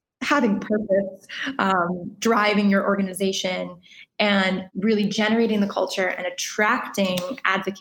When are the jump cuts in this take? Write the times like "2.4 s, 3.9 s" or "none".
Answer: 4.7 s